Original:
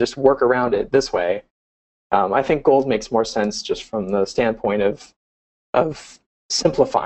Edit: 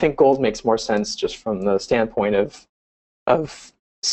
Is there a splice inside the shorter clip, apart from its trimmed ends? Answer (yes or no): no